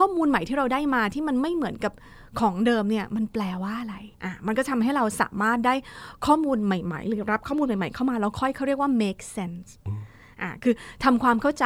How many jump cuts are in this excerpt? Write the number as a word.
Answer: one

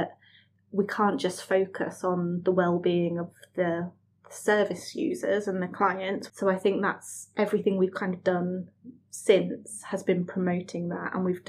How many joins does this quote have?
one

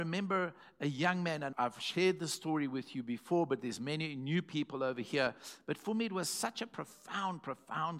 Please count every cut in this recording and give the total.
zero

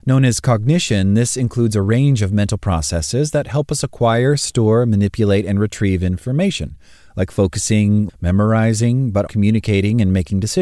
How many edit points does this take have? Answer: two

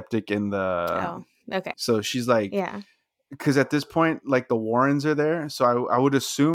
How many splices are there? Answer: one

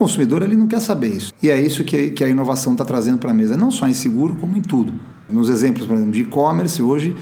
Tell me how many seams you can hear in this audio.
two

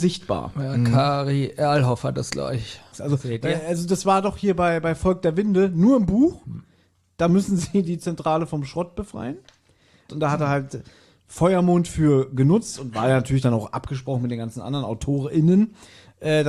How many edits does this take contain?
two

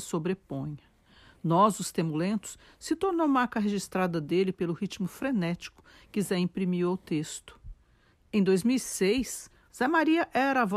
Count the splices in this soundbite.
two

